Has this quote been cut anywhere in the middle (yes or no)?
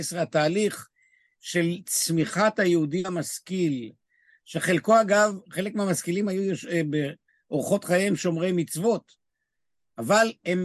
no